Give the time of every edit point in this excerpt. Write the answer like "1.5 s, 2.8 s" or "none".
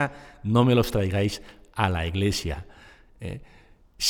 none